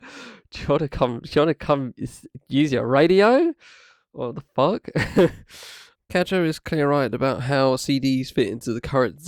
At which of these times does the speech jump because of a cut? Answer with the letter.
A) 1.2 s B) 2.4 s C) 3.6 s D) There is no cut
D